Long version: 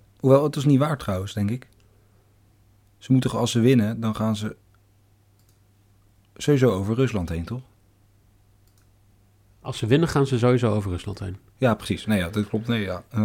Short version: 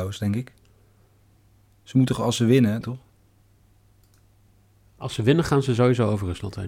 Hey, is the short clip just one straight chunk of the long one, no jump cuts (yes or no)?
no